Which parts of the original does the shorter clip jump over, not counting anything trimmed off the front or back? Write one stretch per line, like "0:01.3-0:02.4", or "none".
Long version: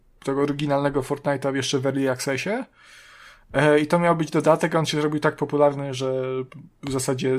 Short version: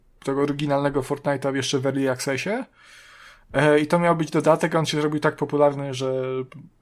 none